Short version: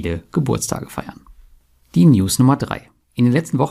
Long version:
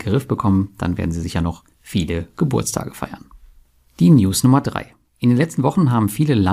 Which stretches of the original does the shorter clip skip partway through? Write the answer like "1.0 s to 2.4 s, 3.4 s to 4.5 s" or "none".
none